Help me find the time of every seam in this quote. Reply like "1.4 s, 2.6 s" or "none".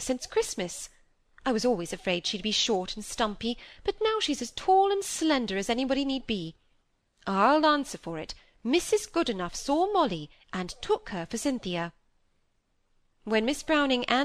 none